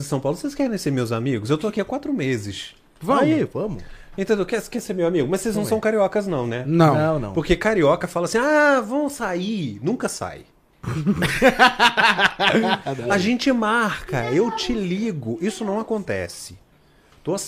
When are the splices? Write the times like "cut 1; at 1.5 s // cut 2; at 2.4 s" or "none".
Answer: none